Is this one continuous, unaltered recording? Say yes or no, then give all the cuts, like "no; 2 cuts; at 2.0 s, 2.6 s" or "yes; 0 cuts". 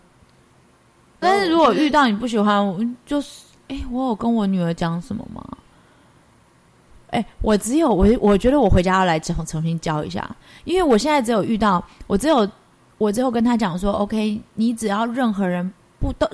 no; 1 cut; at 1.2 s